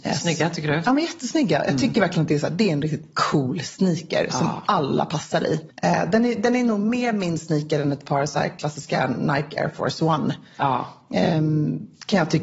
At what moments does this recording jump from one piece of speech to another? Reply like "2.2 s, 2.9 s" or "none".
5.7 s